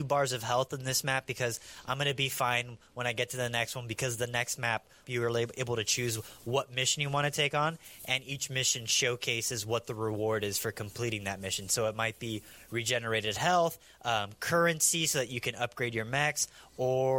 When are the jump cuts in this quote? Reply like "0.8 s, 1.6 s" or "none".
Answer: 5.0 s